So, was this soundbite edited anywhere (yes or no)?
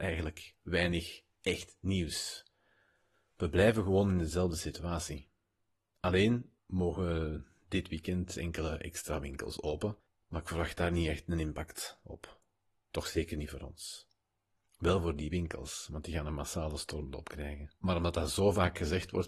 no